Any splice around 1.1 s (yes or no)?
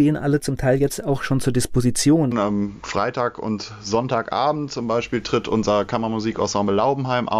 no